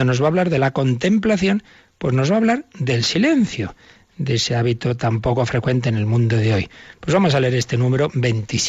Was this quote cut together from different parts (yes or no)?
no